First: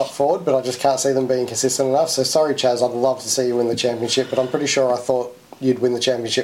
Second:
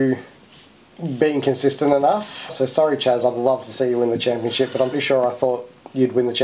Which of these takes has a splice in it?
second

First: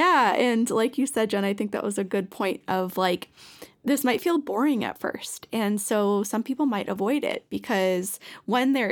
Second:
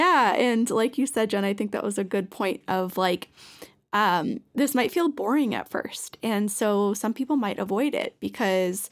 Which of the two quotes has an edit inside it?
first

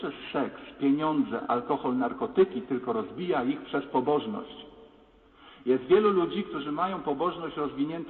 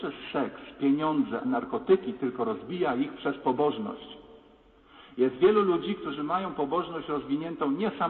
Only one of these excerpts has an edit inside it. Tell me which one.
second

